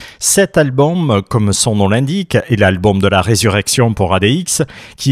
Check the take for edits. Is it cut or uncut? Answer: uncut